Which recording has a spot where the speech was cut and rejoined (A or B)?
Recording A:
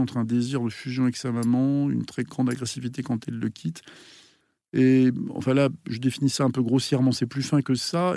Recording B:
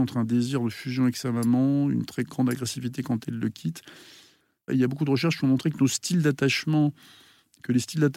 B